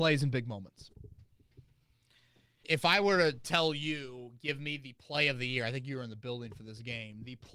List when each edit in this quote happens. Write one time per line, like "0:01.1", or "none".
0:02.6